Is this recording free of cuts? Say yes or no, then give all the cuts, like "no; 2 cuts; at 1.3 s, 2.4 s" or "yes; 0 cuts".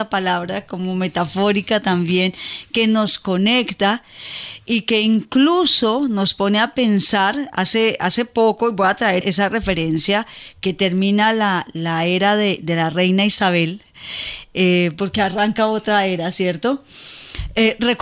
no; 1 cut; at 9.2 s